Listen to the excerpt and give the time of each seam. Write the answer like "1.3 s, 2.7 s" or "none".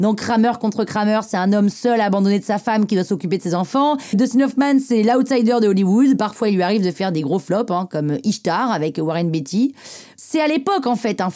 4.1 s